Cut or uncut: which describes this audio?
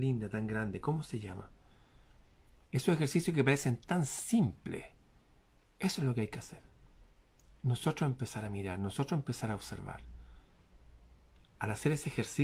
uncut